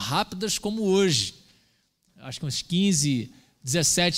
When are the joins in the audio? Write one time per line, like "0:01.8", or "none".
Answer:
0:02.1